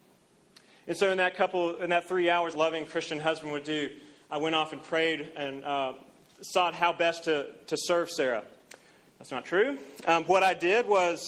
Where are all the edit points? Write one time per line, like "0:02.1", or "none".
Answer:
0:02.5

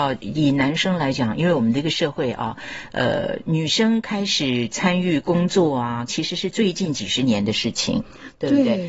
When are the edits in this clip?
0:06.1

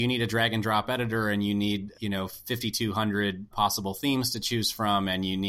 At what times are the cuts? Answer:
0:01.9
0:03.5

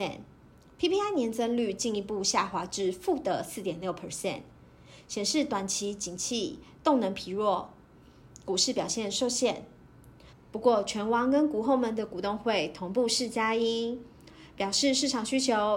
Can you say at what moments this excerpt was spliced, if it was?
0:10.3

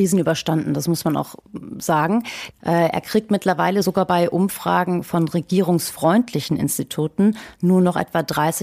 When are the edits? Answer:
0:02.5

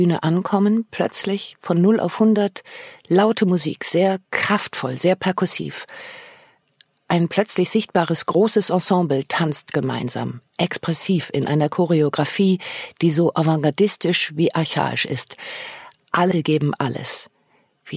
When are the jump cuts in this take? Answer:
none

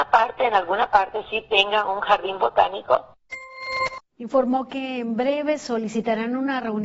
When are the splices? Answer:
none

